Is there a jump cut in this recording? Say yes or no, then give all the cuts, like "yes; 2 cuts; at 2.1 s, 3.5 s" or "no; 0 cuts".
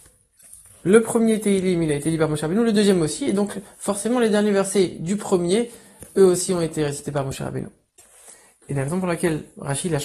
no; 0 cuts